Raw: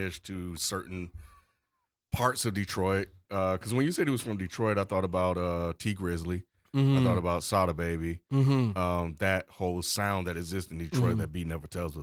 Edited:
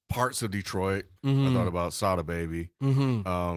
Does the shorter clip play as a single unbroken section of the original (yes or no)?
no